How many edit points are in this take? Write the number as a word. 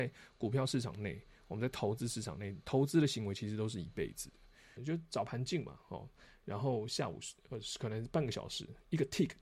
one